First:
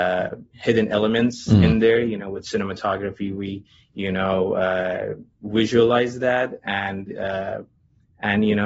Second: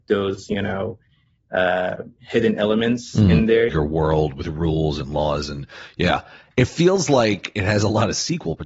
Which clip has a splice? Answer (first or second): second